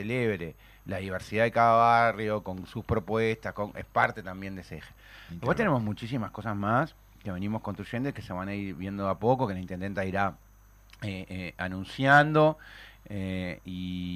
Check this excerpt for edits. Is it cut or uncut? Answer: uncut